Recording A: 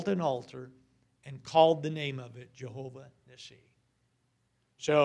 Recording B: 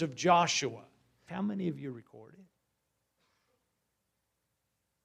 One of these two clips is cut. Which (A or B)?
B